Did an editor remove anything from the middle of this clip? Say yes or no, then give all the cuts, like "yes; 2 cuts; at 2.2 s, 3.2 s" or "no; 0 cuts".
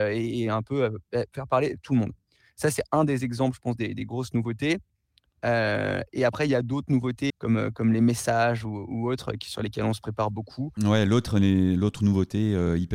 yes; 2 cuts; at 7.3 s, 10.8 s